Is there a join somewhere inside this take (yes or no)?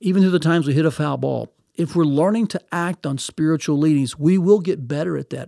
no